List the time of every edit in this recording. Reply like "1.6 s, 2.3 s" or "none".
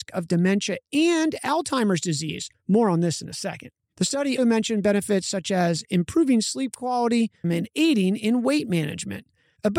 4.4 s, 7.4 s